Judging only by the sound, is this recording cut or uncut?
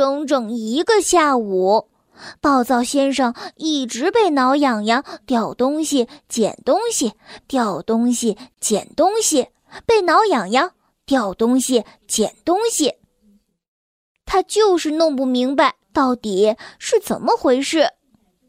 cut